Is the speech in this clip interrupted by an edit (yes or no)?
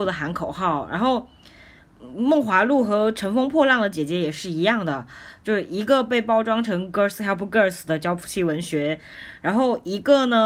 no